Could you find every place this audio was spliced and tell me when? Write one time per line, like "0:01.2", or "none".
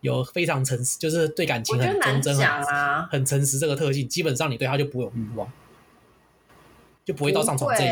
none